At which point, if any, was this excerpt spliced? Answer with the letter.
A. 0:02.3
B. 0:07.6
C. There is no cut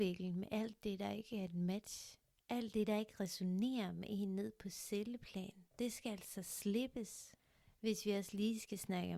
C